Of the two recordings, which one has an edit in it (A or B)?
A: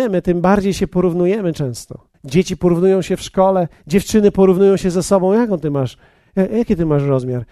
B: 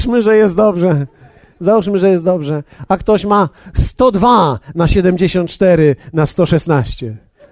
A